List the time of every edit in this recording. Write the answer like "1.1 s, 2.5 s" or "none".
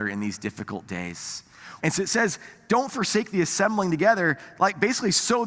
1.8 s